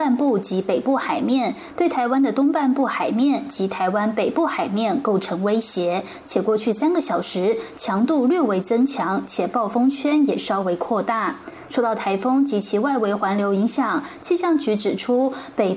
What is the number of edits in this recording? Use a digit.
0